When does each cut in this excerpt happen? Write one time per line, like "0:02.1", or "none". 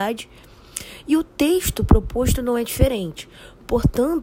none